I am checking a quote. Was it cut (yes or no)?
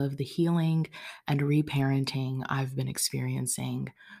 no